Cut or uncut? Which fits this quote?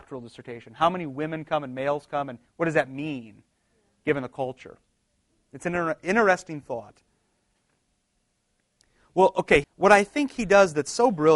cut